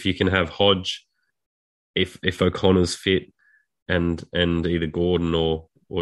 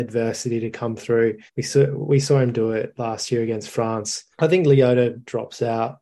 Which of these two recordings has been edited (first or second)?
second